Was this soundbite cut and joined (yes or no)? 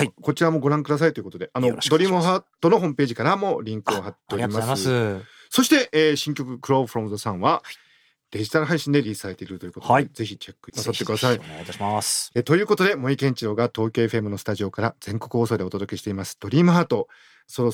yes